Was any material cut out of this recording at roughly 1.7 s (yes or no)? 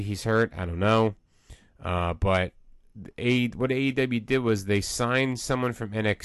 no